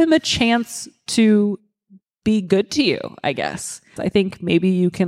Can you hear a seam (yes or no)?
yes